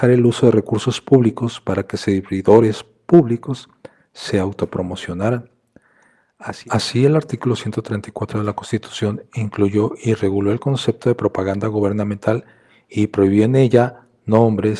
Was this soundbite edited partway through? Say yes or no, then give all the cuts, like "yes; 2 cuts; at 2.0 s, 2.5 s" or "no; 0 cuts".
no; 0 cuts